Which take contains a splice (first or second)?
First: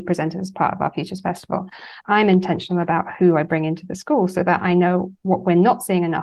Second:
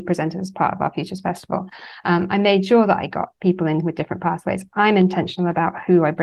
first